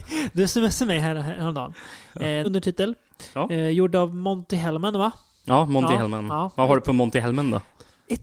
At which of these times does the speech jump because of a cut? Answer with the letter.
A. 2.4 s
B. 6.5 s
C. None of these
A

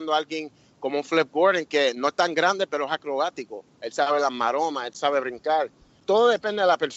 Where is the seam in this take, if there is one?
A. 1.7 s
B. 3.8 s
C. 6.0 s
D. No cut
C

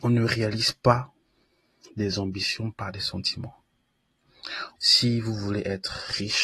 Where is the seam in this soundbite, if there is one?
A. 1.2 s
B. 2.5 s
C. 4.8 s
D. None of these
C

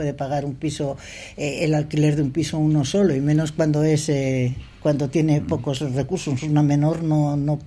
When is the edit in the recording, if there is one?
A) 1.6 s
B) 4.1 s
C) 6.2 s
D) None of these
D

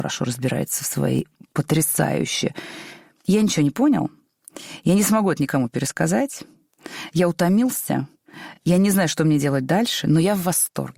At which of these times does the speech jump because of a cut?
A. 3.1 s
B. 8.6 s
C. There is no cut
C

